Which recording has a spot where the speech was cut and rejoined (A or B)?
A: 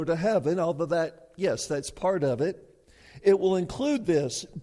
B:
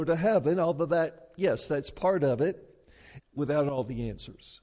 B